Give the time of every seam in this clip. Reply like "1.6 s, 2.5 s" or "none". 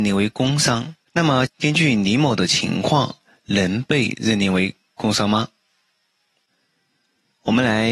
1.5 s